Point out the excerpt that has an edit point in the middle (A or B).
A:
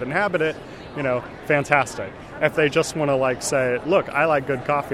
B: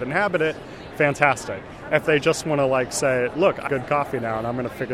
B